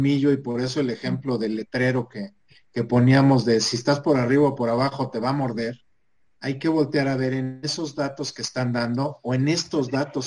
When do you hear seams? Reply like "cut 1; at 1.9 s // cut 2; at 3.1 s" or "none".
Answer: cut 1; at 6.4 s